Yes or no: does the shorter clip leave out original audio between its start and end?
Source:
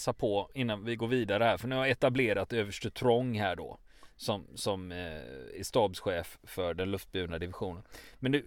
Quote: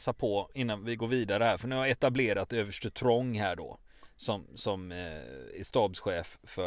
no